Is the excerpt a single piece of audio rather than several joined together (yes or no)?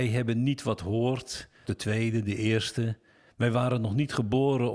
no